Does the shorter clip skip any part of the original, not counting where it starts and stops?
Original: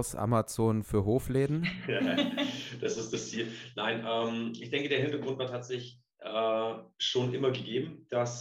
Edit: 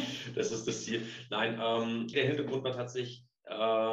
yes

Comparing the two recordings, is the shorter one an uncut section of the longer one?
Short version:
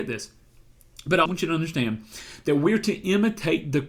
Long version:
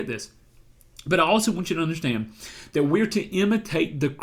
no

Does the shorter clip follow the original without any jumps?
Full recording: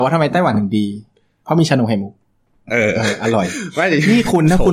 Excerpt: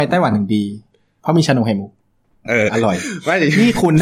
no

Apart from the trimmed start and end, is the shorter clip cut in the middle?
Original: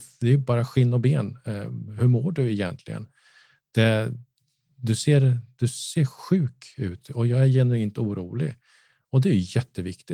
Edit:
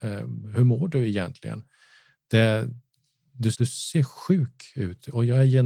yes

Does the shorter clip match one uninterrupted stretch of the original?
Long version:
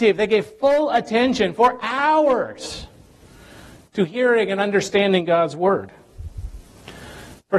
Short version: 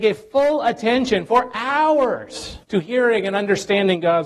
no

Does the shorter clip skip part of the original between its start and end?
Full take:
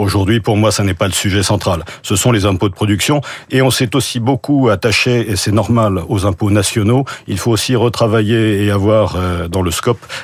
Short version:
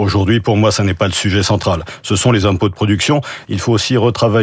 yes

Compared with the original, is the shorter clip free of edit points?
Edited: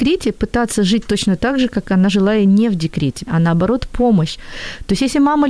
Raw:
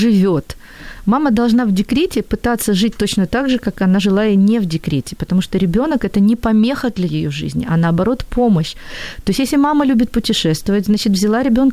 no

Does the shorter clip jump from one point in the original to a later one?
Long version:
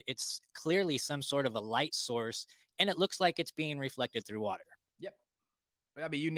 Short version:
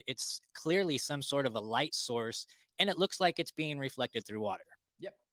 no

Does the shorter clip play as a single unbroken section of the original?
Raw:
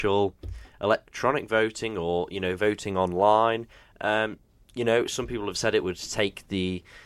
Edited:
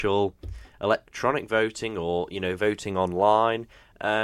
yes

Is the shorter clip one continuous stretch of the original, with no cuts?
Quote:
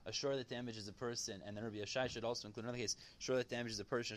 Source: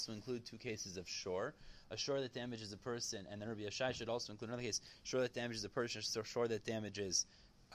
yes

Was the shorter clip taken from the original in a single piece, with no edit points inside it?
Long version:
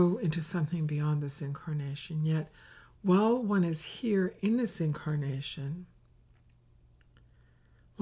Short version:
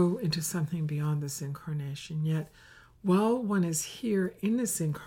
yes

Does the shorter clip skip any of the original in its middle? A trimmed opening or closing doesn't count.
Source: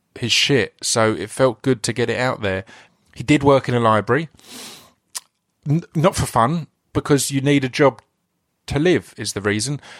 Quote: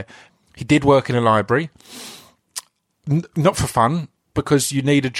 no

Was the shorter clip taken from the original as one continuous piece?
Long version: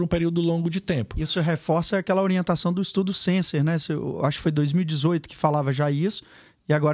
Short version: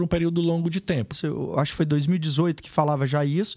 no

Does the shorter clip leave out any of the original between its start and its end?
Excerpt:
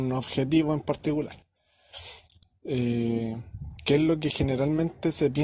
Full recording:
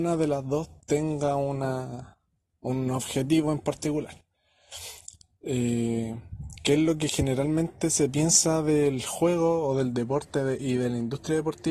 no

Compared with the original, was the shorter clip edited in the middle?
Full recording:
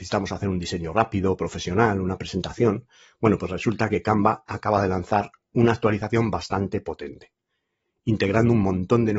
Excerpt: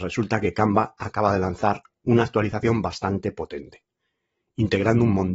no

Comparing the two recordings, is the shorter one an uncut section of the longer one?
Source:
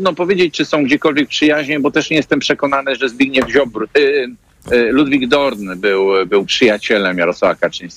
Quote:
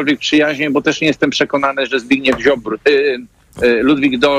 yes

